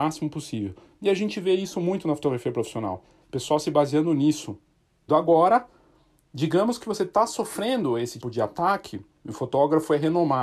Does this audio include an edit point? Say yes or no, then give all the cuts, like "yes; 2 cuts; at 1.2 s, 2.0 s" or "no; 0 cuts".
yes; 2 cuts; at 5.1 s, 8.2 s